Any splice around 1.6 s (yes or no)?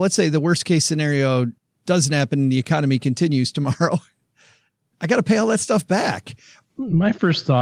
no